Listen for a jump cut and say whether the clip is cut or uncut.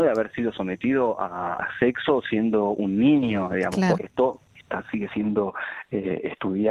cut